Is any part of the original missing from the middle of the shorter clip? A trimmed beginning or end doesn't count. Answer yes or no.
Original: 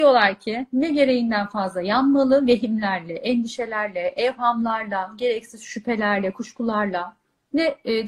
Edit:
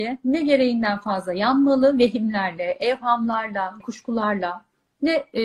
yes